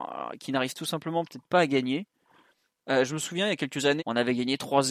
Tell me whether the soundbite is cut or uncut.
cut